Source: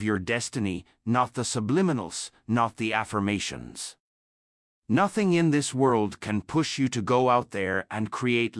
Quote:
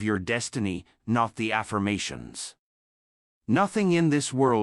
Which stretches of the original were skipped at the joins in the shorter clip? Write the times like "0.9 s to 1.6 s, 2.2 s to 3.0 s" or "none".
1.0 s to 2.4 s